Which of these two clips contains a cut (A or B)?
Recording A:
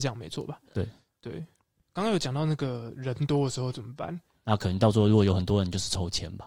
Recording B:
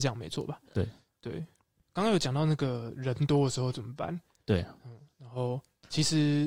A